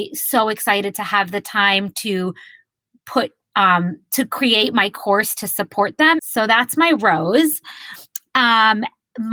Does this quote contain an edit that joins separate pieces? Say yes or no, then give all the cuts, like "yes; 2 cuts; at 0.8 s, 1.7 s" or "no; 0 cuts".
yes; 1 cut; at 6.2 s